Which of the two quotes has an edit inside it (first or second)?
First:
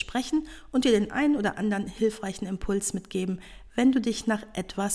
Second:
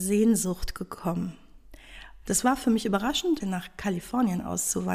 second